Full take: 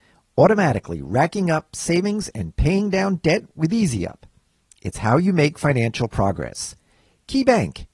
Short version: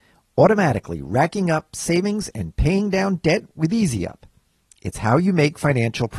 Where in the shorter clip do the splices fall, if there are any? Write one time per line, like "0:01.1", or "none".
none